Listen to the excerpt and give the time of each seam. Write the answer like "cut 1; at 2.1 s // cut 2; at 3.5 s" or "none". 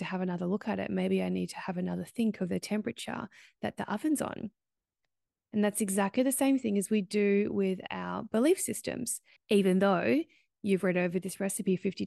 cut 1; at 9.4 s